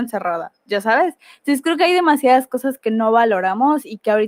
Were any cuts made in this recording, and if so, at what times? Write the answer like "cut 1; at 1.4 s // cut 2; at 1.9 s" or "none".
none